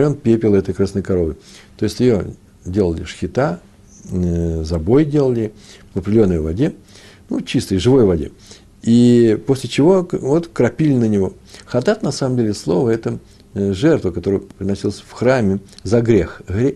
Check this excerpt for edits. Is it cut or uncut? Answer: cut